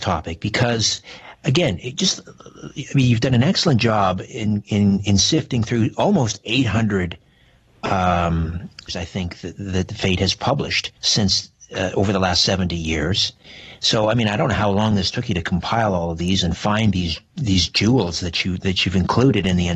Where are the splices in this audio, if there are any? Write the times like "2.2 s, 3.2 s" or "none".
8.9 s, 11.0 s